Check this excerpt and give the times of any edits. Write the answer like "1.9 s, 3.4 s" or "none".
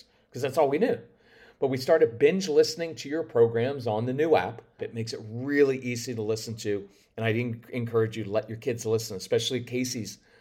4.8 s